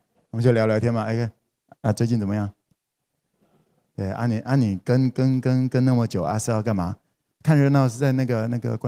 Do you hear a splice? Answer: no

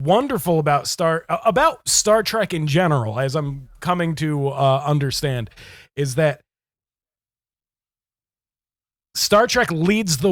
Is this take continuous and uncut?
yes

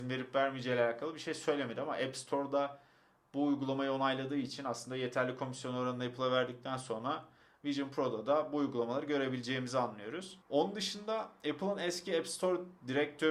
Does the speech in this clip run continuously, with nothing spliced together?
no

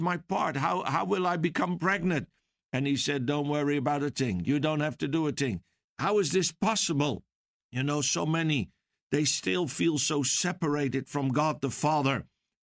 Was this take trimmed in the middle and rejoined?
yes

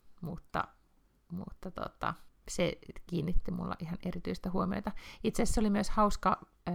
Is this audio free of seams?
yes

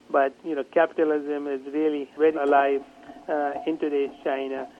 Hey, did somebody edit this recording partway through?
yes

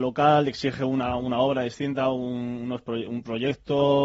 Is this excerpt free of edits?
yes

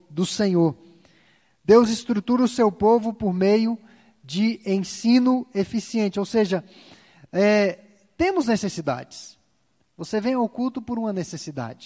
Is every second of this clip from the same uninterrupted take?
yes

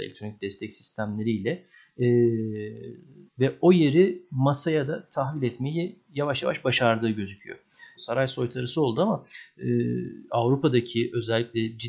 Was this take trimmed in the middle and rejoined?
yes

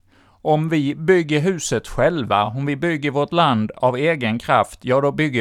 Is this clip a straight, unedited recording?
yes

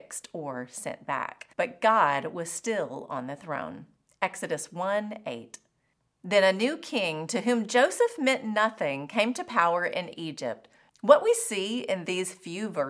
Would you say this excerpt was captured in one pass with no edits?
no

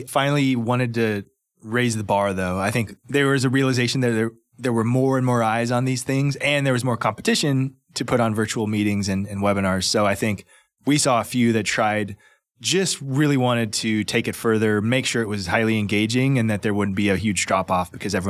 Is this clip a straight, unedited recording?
yes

